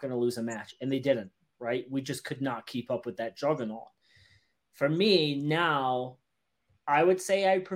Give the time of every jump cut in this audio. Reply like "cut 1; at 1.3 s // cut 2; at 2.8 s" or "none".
none